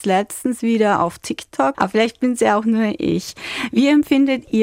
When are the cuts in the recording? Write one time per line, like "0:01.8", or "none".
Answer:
0:01.7

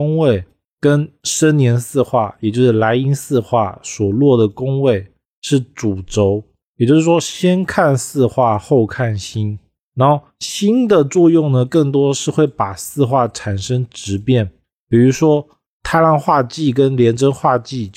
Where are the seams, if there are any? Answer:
none

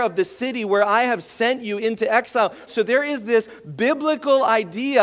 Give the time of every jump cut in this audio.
0:02.7

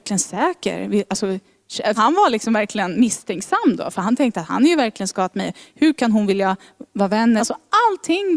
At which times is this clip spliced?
0:02.0
0:07.4

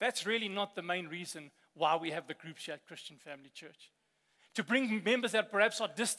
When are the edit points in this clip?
0:04.4

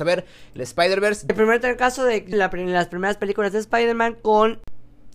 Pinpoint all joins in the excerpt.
0:01.3
0:02.3

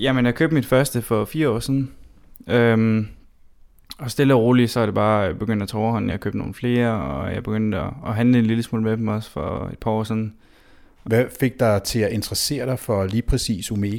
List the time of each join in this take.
none

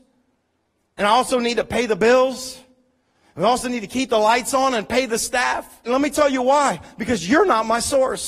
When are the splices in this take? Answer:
0:05.8

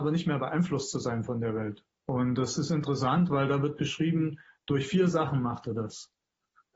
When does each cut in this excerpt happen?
0:01.9

